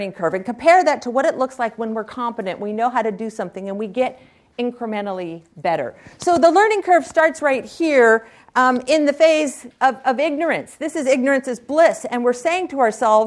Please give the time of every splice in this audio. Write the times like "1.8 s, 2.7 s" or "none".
none